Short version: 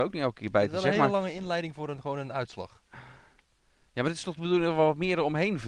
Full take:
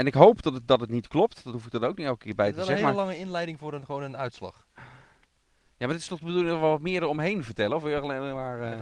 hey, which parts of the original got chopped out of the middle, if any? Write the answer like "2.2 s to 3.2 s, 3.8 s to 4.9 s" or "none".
none